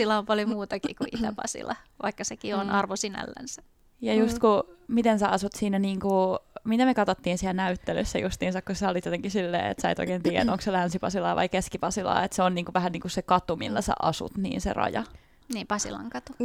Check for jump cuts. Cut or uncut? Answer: cut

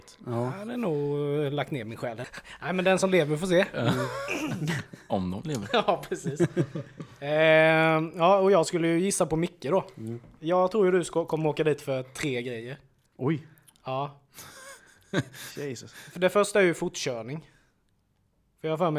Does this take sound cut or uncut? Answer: cut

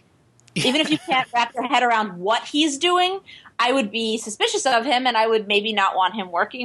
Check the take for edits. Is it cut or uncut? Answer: uncut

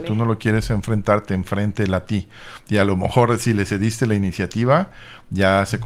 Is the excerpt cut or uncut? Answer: uncut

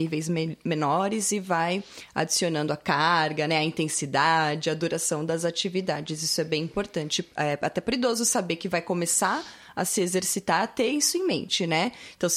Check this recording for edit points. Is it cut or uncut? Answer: uncut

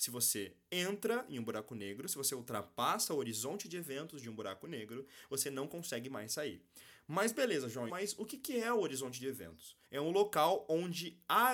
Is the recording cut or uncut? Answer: cut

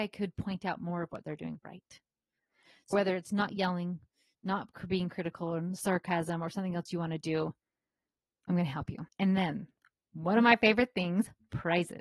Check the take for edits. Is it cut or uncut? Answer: cut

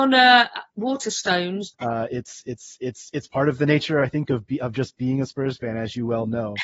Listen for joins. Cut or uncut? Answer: cut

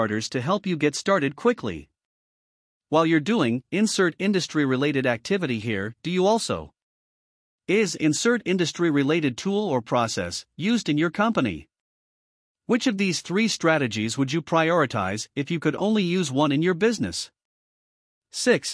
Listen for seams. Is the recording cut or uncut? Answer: uncut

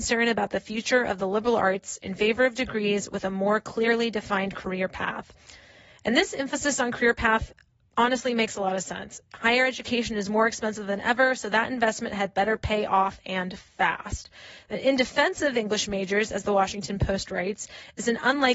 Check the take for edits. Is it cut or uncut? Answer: uncut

